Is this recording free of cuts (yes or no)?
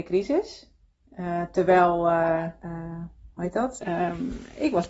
no